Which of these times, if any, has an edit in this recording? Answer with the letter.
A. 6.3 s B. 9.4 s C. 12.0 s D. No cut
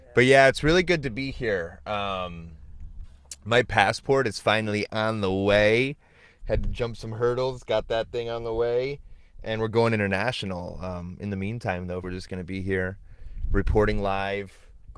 C